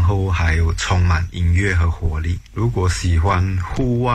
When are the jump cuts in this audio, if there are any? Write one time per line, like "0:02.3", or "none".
0:02.5